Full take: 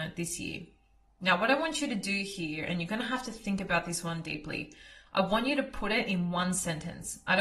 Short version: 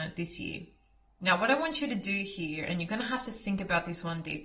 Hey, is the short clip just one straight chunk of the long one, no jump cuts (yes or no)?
yes